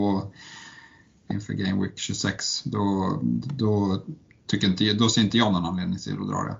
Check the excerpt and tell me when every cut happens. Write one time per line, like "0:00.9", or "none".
0:01.3